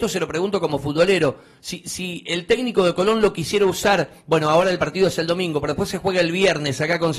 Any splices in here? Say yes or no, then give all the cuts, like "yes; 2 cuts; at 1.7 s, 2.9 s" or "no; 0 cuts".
no; 0 cuts